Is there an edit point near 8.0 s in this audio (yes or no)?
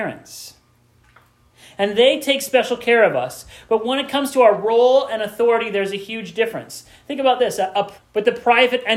yes